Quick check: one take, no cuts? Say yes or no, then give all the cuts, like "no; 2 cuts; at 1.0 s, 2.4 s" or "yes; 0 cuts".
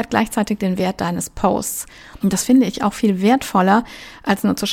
no; 1 cut; at 2.2 s